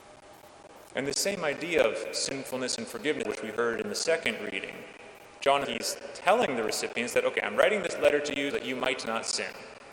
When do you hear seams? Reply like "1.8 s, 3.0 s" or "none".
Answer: 3.2 s, 5.6 s, 8.5 s